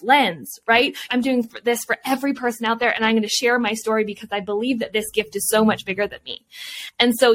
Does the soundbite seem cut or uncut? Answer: cut